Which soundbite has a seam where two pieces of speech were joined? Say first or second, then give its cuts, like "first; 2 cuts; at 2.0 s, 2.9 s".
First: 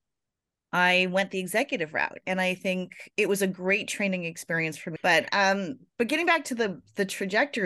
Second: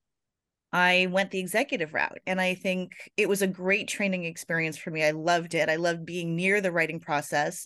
first; 1 cut; at 5.0 s